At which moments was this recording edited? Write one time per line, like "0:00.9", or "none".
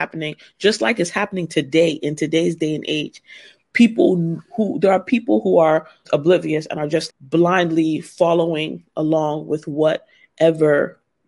0:06.0
0:07.1